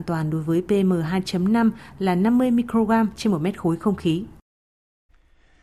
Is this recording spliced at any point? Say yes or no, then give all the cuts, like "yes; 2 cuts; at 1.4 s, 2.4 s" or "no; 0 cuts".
no; 0 cuts